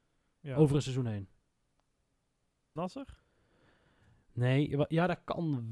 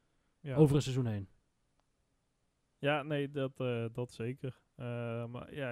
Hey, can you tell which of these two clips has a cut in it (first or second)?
first